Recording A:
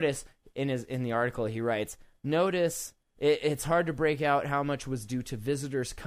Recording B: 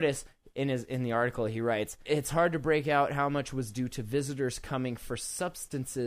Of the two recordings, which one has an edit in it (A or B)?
B